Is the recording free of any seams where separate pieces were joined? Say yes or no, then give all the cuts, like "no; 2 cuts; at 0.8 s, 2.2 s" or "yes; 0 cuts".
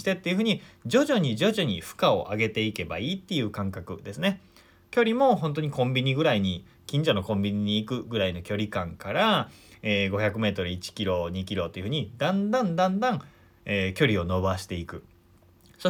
yes; 0 cuts